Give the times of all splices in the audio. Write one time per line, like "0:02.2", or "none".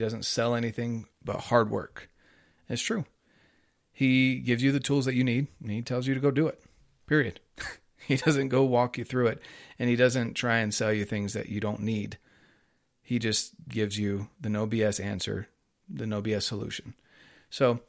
none